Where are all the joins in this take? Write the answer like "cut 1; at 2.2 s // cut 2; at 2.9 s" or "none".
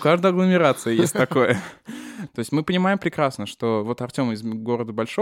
cut 1; at 2.3 s